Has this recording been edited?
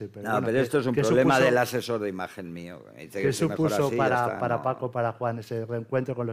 no; 0 cuts

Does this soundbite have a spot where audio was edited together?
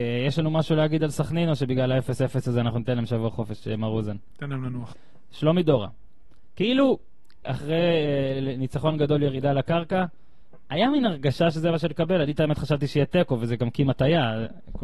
yes; 2 cuts; at 4.9 s, 7.4 s

